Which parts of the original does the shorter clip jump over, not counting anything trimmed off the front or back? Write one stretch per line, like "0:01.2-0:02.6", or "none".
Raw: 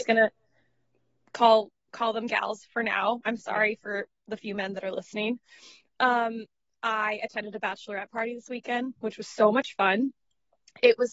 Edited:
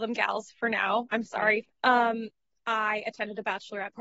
0:03.8-0:05.8